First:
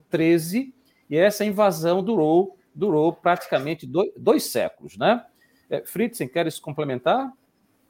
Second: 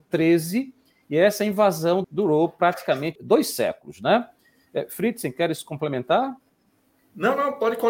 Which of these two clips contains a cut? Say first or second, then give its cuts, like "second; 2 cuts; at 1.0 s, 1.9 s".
second; 2 cuts; at 2.0 s, 3.2 s